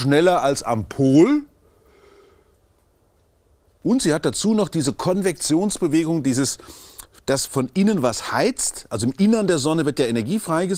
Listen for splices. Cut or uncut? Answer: uncut